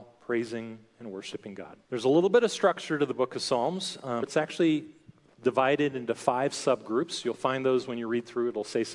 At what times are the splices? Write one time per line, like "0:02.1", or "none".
0:01.8
0:04.2